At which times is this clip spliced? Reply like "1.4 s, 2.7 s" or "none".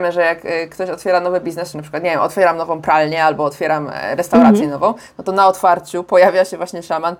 1.7 s